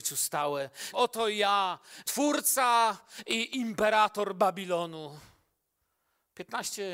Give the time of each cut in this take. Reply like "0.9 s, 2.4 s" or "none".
0.9 s, 2.0 s